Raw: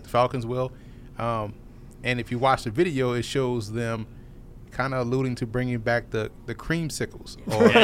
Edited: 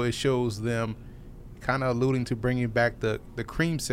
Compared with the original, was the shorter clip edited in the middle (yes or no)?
no